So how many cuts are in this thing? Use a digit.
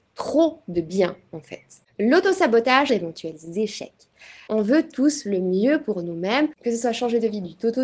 2